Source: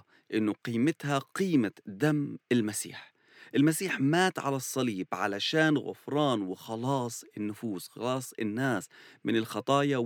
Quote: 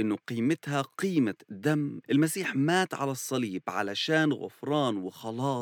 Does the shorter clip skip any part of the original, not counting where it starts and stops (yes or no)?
yes